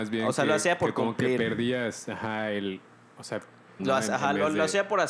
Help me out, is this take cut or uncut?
cut